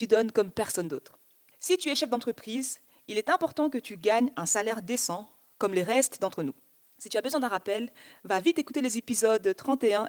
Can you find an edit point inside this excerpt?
yes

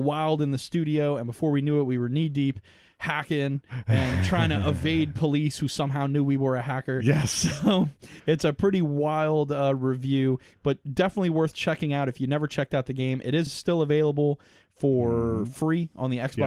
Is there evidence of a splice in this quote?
no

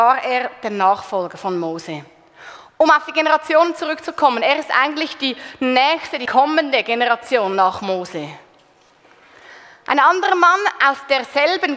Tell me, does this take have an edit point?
no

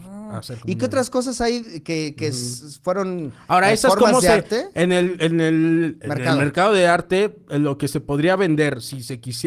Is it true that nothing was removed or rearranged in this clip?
yes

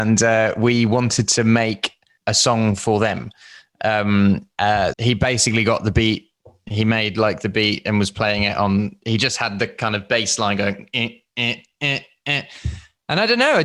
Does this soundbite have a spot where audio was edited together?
yes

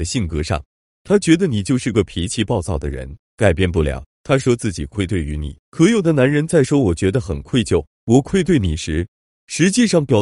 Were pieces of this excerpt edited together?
yes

